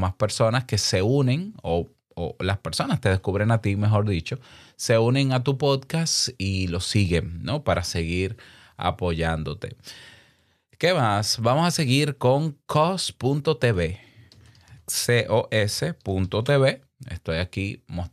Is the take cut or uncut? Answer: uncut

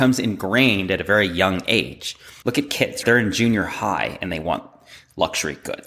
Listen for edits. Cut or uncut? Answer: cut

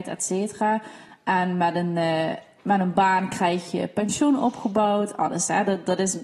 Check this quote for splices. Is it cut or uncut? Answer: uncut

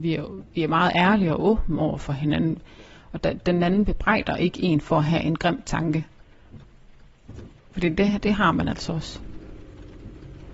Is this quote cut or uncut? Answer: uncut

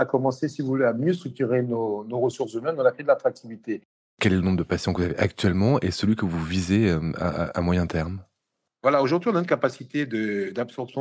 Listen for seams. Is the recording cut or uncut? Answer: uncut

